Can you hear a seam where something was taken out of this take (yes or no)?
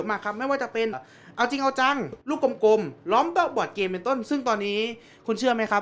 yes